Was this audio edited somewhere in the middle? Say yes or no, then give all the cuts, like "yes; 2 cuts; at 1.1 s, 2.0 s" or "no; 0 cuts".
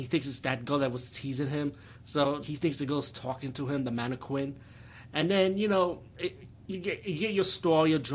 yes; 1 cut; at 2.4 s